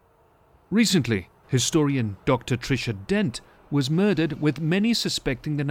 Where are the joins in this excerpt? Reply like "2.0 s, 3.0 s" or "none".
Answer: 1.4 s